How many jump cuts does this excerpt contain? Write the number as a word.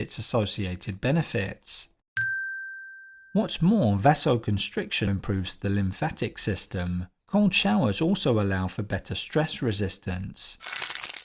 two